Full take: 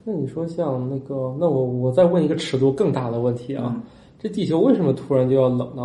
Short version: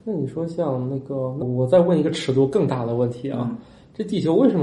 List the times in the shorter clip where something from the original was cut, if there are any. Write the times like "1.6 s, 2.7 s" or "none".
1.4 s